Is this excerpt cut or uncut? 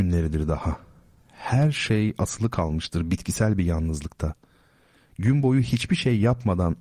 uncut